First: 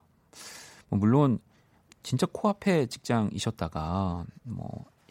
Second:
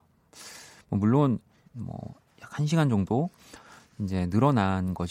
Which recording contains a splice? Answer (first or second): second